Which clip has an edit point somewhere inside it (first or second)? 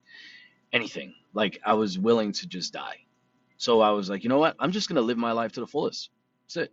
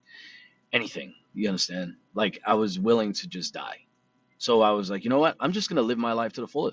first